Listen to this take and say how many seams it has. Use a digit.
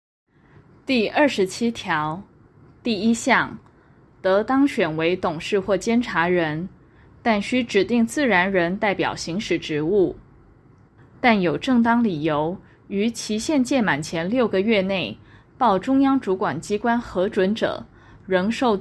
2